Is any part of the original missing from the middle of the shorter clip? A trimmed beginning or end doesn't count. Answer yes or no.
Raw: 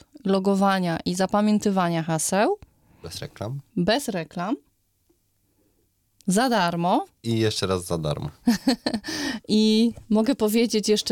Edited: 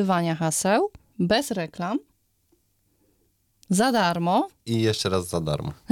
yes